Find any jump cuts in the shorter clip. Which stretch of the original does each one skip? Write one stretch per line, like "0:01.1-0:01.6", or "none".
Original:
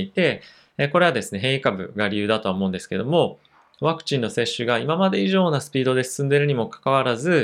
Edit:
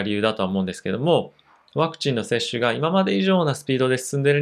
none